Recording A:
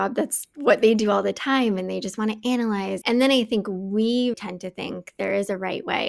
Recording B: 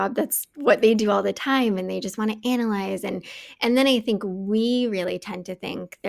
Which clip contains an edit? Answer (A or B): A